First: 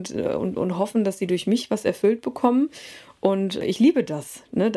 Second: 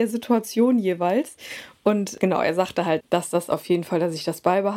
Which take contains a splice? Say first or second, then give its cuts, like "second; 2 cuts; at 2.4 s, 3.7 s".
second; 1 cut; at 3.0 s